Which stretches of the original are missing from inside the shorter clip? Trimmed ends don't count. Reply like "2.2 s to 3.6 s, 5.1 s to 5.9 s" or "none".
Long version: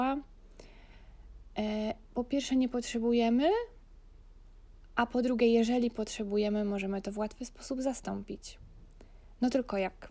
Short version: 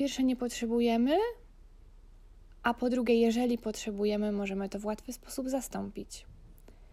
none